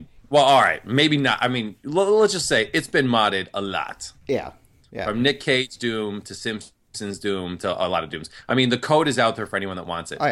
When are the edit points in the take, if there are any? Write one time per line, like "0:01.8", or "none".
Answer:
none